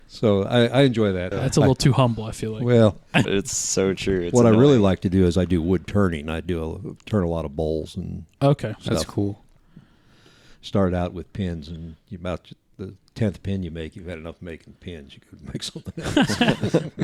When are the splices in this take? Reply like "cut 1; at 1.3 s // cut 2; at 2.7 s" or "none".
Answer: cut 1; at 1.3 s // cut 2; at 3.2 s